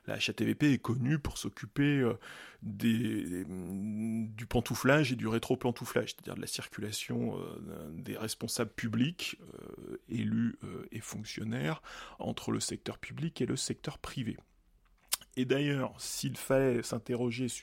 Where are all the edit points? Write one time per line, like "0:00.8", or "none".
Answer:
0:12.2

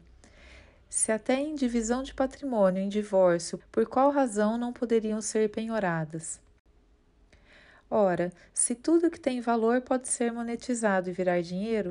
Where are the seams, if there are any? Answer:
0:03.6

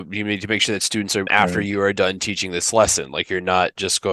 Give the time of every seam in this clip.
0:01.3

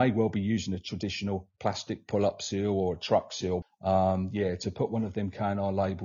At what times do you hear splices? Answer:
0:03.6

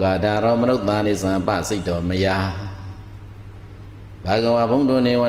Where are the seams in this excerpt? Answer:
0:01.0

